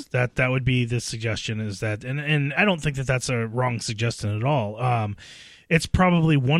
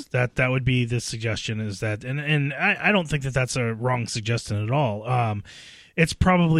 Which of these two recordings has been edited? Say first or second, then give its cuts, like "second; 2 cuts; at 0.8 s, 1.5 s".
first; 1 cut; at 2.5 s